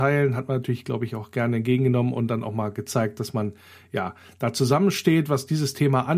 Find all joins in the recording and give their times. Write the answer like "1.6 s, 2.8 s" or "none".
none